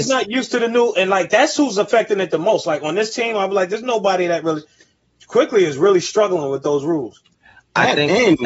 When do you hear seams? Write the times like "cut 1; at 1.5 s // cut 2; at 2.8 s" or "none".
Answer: none